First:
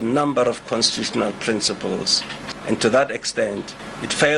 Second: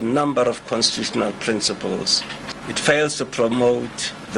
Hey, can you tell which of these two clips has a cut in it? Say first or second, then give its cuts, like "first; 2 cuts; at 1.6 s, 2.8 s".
second; 1 cut; at 2.6 s